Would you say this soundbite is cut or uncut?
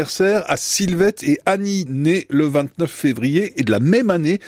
cut